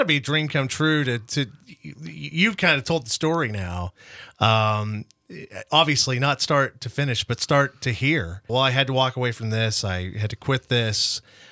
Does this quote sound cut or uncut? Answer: cut